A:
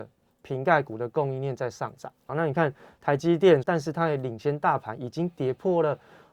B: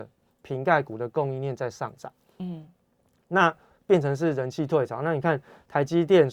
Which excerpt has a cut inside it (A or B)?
A